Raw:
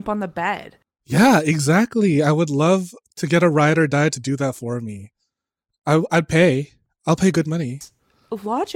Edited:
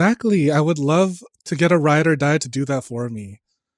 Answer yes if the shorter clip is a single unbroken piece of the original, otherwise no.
yes